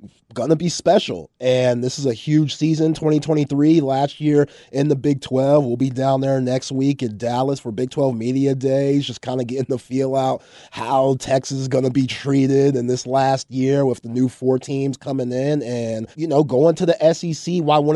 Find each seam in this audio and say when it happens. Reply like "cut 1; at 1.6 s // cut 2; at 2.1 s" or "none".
cut 1; at 16.1 s